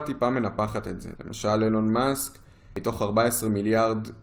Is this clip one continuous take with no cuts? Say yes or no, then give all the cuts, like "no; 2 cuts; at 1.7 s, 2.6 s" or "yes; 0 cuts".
no; 1 cut; at 1.1 s